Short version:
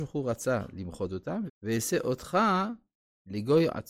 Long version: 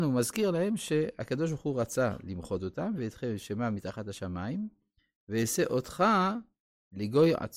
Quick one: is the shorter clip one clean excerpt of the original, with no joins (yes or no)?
no